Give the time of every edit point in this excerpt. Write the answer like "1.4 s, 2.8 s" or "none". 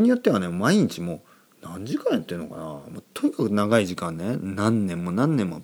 none